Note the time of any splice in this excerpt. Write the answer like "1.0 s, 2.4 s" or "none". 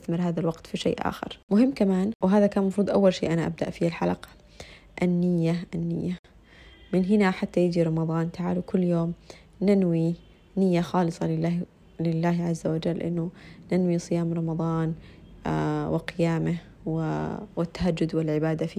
5.7 s